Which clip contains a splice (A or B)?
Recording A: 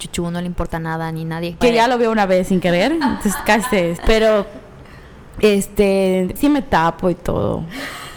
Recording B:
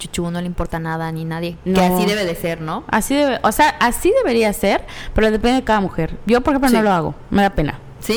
A